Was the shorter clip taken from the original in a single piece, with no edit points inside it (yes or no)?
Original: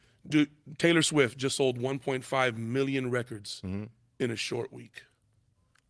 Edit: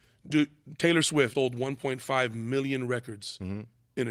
no